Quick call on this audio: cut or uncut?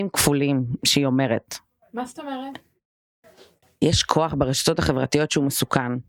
uncut